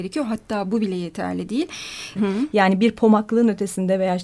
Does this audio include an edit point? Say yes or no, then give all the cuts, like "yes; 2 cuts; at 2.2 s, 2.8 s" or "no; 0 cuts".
yes; 1 cut; at 2.2 s